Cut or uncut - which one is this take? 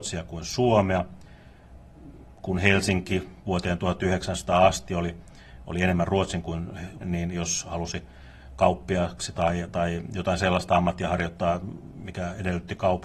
cut